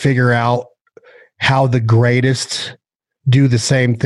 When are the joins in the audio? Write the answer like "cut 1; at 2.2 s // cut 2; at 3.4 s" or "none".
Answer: none